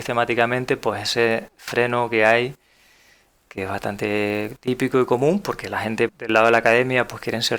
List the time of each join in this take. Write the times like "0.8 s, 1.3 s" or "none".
6.1 s